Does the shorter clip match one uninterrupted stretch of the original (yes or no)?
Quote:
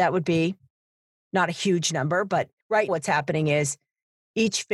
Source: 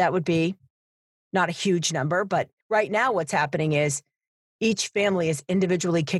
no